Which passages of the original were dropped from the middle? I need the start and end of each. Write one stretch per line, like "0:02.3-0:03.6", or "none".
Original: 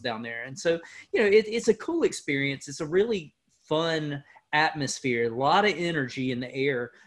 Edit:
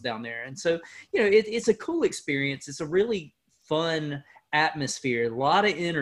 none